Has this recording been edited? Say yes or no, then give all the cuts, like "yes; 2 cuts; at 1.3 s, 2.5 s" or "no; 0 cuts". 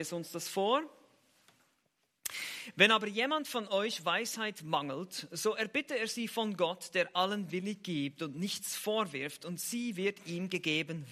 no; 0 cuts